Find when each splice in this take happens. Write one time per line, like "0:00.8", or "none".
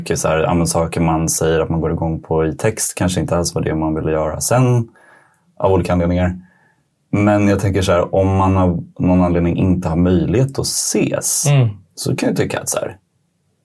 none